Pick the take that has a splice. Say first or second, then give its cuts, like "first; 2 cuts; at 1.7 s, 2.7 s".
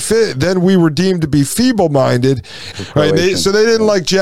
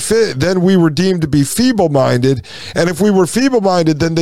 first; 1 cut; at 2.7 s